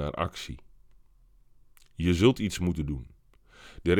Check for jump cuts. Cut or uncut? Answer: uncut